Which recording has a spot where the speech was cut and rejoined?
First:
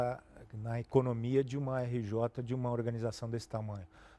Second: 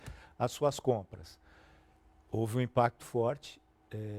second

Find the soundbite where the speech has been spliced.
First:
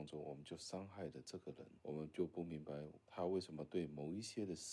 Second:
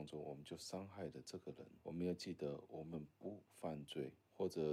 first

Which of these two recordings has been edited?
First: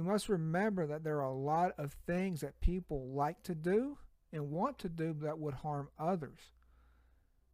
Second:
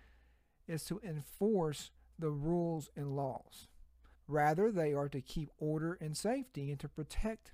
second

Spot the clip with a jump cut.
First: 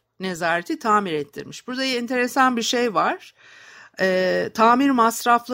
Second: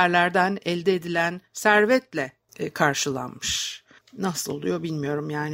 second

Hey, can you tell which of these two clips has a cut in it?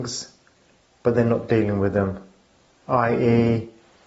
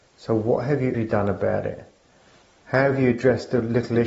second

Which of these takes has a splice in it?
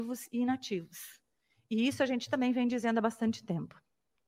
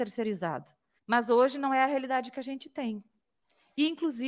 second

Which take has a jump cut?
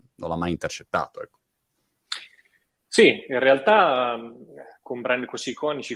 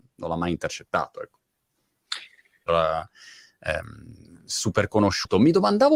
second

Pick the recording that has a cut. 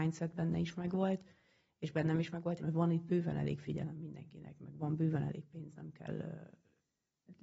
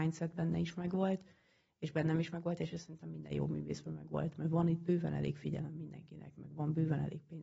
first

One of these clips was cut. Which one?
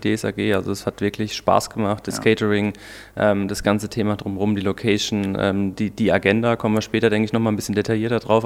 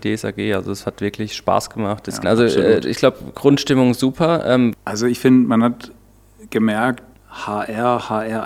second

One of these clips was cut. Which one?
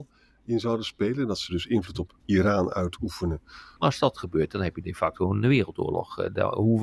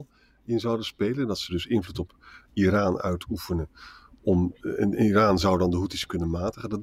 first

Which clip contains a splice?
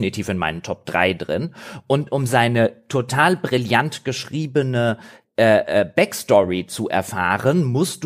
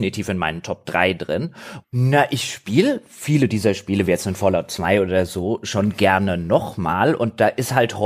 second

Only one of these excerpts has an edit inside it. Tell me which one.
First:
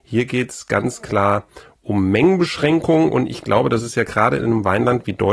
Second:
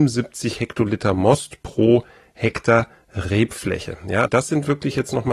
second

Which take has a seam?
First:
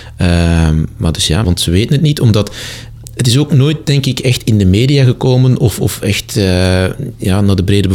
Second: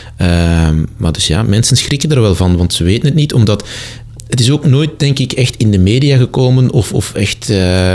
first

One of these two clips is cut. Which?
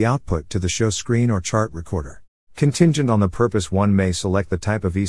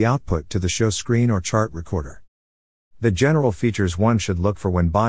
first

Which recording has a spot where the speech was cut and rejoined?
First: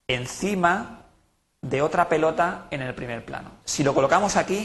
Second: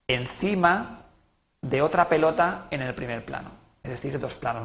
first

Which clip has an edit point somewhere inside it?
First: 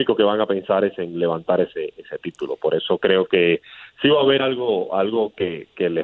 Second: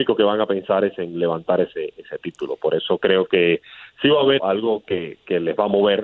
second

